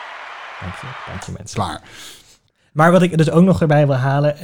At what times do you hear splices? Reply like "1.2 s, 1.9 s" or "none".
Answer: none